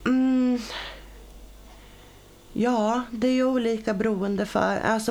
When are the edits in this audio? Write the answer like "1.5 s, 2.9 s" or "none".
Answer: none